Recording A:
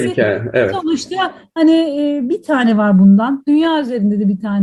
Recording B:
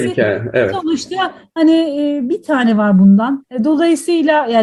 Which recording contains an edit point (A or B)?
B